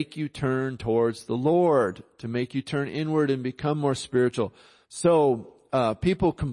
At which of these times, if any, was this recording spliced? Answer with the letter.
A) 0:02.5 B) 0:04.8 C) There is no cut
B